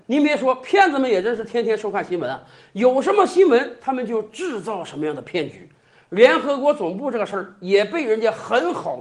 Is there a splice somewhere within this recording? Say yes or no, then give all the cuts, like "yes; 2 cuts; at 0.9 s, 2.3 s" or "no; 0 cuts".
no; 0 cuts